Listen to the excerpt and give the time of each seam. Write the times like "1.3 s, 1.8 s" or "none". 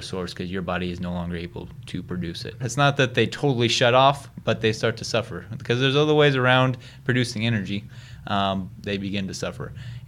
2.6 s, 8.8 s